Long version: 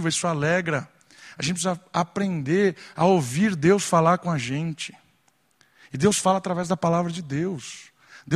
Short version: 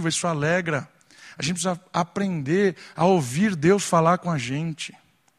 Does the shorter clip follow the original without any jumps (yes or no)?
yes